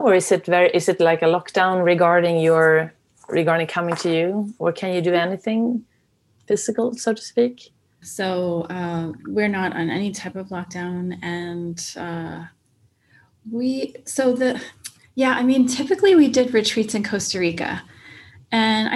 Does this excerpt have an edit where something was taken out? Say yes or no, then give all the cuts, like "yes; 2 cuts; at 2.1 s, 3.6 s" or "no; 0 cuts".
yes; 1 cut; at 8.0 s